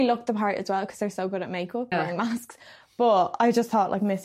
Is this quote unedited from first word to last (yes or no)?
no